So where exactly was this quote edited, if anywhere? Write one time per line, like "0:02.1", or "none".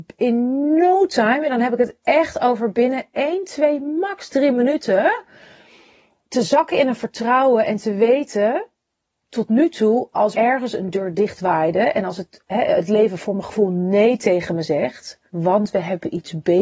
0:10.3
0:15.3